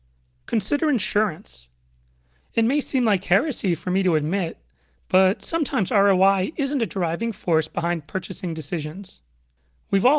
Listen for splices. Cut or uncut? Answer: cut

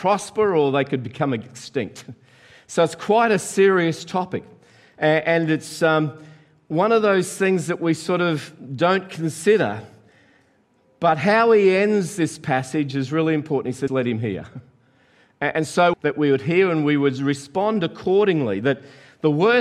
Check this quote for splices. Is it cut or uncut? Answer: cut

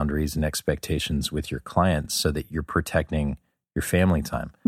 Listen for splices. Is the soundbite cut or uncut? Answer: uncut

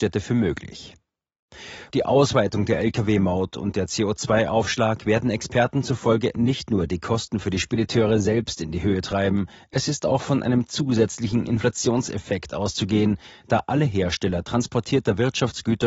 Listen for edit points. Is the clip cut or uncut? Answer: cut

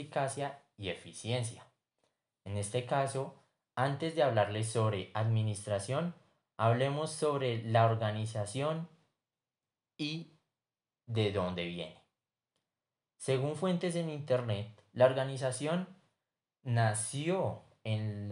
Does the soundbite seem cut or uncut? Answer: uncut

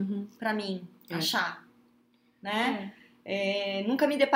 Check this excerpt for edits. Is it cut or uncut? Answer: uncut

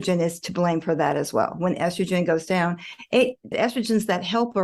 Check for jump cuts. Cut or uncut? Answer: cut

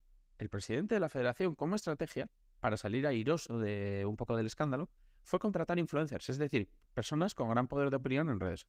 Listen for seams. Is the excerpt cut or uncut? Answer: uncut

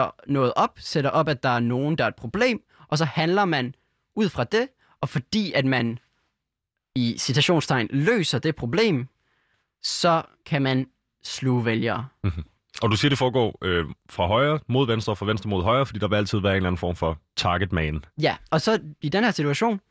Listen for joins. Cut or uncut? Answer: uncut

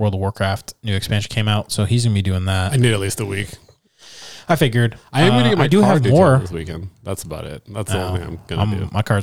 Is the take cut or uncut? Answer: uncut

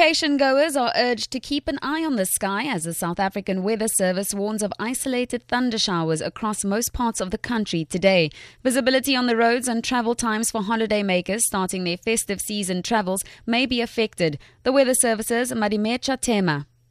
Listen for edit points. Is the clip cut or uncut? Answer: uncut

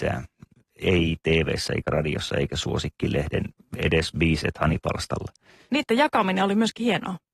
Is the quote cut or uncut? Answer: cut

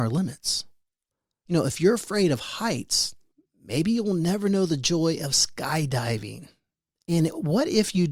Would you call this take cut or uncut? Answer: cut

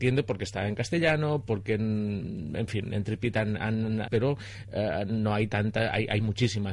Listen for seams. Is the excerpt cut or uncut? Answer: cut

